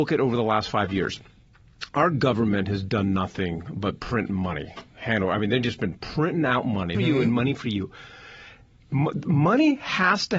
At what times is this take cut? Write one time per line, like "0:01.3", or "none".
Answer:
0:06.9